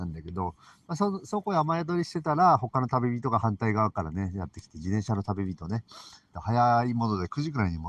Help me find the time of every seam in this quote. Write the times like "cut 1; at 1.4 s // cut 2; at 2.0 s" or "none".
cut 1; at 6.3 s